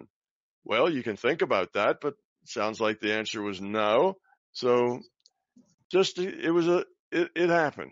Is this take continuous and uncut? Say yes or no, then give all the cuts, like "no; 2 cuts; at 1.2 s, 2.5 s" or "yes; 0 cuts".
no; 1 cut; at 4.4 s